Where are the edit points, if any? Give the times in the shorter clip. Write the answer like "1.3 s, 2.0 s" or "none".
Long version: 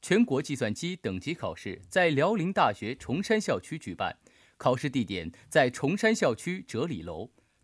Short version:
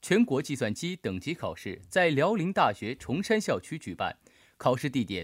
none